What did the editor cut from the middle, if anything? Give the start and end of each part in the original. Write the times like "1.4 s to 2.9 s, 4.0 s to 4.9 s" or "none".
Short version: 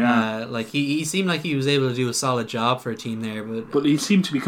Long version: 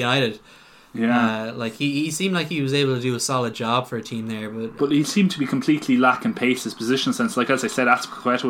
none